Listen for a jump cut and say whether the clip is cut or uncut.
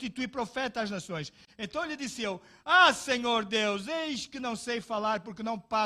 uncut